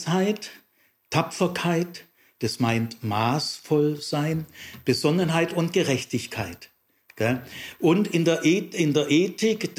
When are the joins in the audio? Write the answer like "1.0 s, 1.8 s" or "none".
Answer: 2.4 s

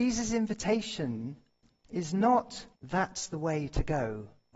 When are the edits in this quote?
2.7 s

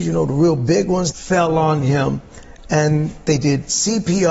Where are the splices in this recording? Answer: 1.1 s

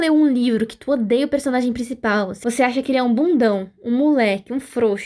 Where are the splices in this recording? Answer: none

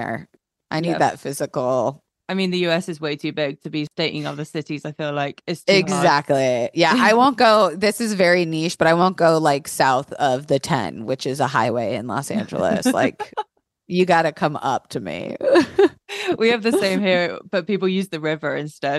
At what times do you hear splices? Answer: none

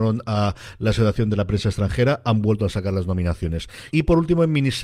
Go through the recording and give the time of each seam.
3.9 s

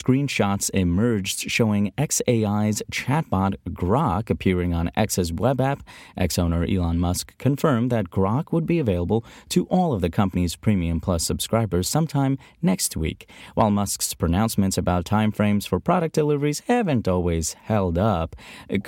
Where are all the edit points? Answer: none

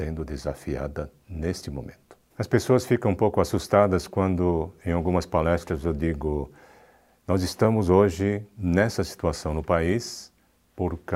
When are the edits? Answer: 2.3 s

